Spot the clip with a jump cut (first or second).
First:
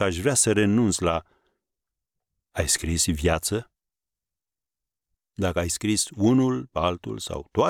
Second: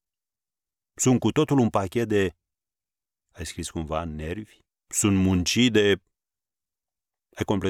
second